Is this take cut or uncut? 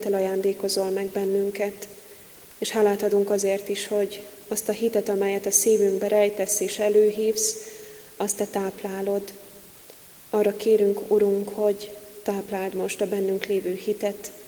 uncut